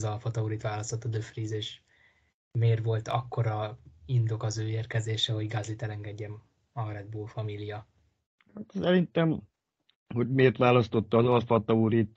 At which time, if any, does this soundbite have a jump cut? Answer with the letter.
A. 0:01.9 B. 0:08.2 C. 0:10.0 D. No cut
D